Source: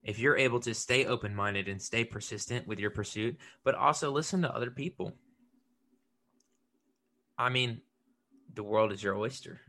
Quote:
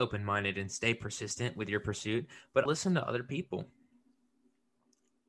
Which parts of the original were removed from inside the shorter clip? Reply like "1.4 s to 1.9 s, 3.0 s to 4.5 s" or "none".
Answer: 3.8 s to 4.1 s